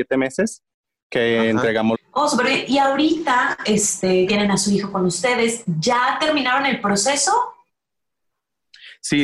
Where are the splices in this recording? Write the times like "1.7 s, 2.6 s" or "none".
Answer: 1.9 s, 4.3 s